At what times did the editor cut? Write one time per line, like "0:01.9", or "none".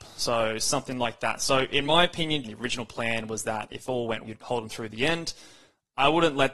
0:02.4
0:04.2

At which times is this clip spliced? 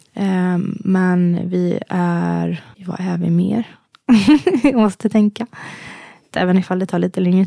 0:02.7
0:06.3

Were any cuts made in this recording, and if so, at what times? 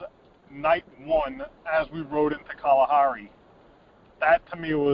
none

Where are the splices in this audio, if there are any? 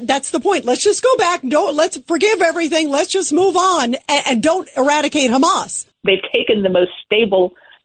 0:05.9

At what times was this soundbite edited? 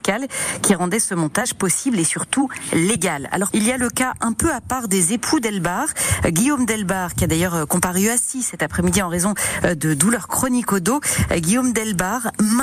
0:03.5

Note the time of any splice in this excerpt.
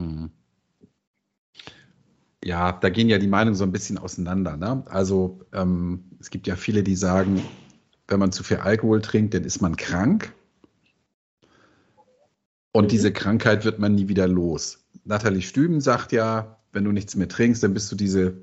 none

